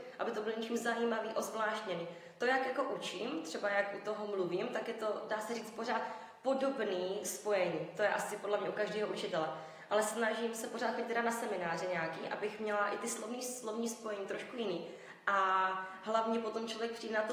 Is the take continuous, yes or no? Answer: yes